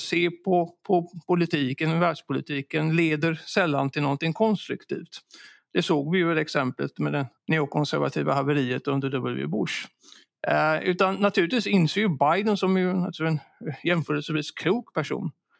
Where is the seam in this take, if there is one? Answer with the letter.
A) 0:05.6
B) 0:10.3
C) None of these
C